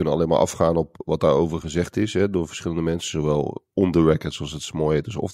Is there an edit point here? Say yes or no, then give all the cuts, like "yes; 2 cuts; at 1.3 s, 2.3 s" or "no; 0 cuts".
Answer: no; 0 cuts